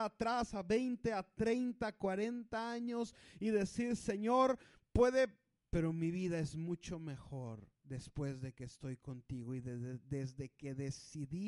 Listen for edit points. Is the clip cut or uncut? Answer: cut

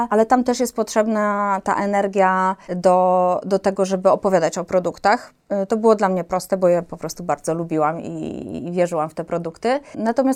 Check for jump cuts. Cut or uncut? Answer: cut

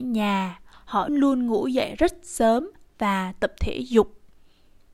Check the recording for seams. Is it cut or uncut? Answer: cut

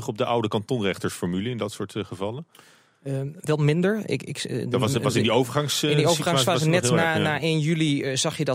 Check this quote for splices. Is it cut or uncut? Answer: uncut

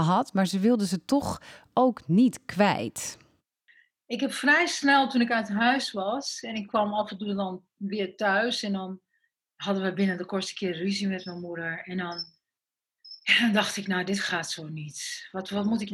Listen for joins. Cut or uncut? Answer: cut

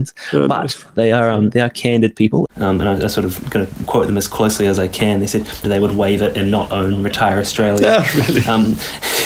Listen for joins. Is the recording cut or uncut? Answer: cut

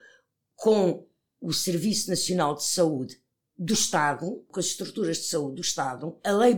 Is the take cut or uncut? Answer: uncut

